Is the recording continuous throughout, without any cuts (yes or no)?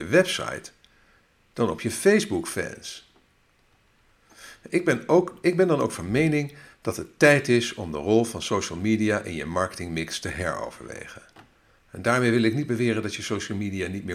yes